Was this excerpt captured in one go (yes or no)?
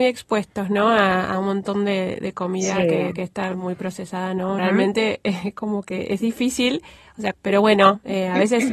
no